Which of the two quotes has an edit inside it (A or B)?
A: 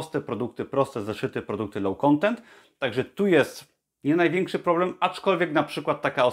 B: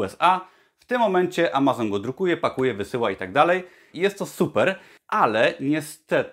B